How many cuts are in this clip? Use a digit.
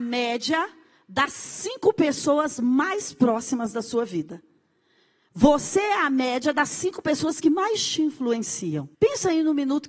1